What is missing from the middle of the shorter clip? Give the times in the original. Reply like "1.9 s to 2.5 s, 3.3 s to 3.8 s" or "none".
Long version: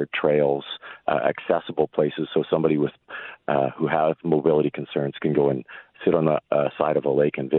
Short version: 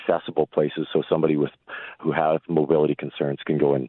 3.4 s to 3.7 s